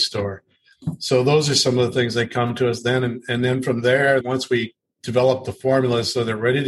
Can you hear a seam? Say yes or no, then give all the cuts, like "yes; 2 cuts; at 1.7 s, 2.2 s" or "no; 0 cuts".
no; 0 cuts